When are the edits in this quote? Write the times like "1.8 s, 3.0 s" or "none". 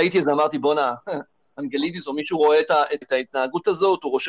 3.0 s